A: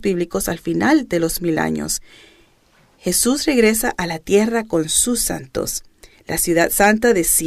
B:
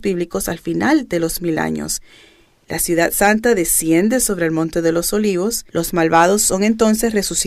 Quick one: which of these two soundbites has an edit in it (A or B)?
B